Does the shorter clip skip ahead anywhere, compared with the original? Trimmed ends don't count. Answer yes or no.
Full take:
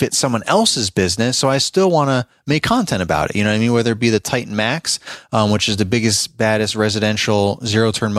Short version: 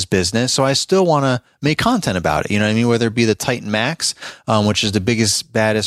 no